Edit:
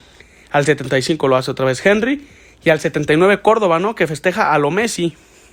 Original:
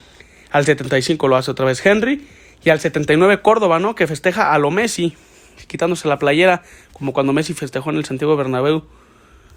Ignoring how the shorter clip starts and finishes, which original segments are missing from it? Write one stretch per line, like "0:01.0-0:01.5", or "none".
none